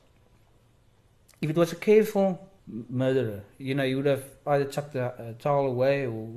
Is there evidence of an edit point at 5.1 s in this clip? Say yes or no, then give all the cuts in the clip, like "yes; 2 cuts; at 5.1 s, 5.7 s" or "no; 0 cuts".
no; 1 cut; at 2.6 s